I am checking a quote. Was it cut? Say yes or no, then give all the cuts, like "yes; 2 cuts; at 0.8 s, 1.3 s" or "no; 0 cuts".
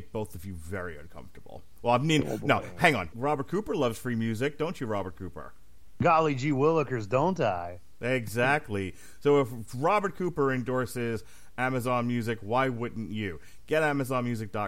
yes; 1 cut; at 3.1 s